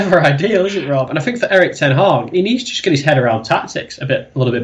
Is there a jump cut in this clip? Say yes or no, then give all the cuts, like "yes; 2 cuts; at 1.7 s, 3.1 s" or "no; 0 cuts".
yes; 1 cut; at 1.1 s